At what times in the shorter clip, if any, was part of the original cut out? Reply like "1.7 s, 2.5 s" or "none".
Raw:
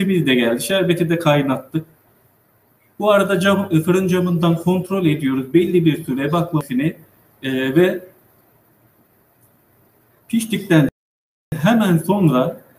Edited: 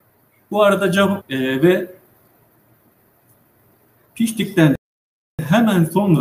1.2 s